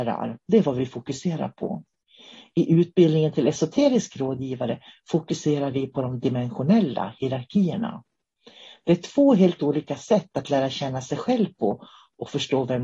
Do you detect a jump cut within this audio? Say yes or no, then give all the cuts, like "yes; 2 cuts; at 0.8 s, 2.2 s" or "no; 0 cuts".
no; 0 cuts